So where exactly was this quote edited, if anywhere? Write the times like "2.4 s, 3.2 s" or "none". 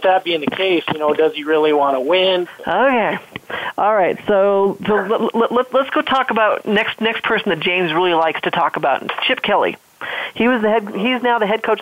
2.4 s

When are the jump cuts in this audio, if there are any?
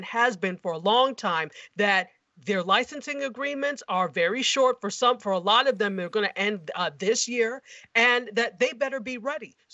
none

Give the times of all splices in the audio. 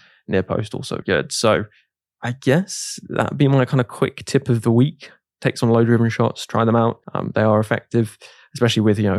1.0 s, 7.0 s

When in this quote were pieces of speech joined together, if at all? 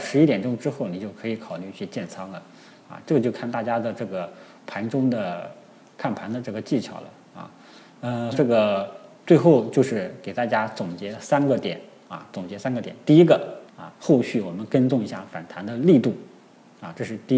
8.3 s, 13.7 s

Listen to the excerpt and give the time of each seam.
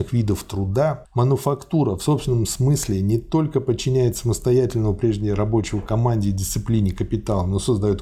1.0 s

